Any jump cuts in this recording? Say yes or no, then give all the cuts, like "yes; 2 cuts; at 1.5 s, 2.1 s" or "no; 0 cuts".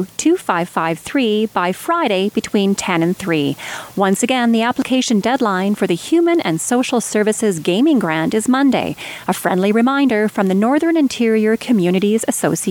no; 0 cuts